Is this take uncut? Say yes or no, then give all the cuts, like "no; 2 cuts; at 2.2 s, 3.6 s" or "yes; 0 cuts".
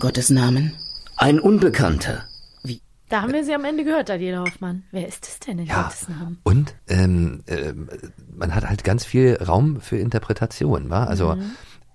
no; 1 cut; at 6.8 s